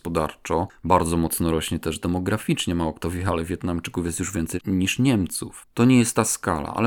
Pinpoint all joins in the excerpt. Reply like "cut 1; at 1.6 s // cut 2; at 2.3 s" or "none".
cut 1; at 5.6 s

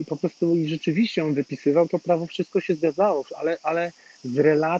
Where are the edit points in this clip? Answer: none

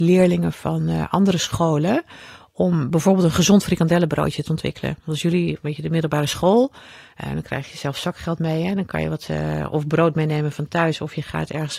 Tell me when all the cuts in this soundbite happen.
none

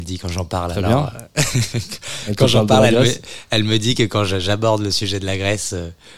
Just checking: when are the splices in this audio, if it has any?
none

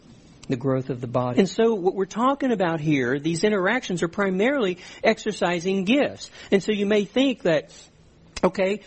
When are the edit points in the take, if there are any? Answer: cut 1; at 1.3 s

